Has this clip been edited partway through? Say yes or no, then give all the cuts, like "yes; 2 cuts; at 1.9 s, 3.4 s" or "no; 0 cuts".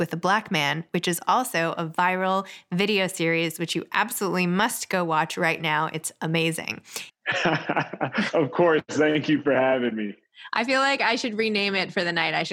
yes; 1 cut; at 7.1 s